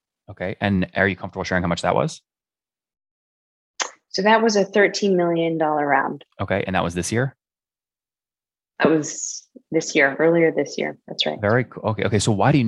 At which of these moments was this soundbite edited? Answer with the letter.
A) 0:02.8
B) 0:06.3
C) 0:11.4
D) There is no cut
B